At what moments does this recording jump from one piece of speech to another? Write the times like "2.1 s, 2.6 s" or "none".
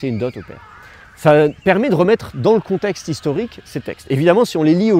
none